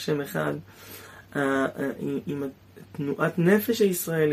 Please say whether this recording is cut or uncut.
uncut